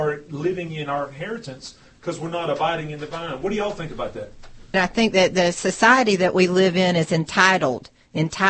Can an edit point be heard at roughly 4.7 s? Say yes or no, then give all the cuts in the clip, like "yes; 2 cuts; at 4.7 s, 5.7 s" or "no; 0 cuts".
yes; 1 cut; at 4.7 s